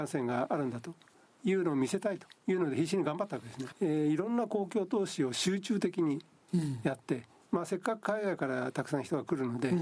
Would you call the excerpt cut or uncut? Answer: cut